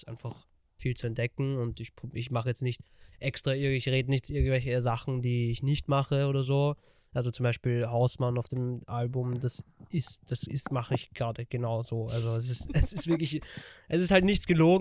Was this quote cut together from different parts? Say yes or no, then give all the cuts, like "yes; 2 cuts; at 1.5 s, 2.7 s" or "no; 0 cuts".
no; 0 cuts